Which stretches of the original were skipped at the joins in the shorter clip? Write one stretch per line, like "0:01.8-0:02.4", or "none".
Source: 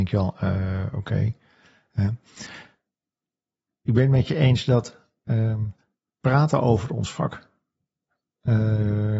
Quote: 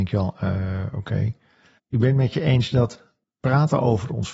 0:01.8-0:03.7
0:05.2-0:06.0